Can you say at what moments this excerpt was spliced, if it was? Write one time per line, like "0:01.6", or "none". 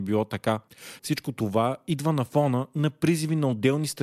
0:01.0